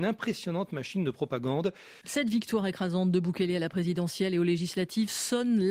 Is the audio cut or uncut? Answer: cut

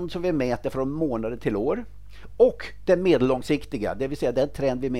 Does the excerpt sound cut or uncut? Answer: uncut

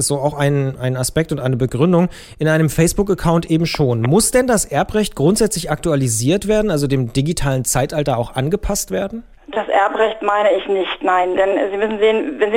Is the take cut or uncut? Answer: uncut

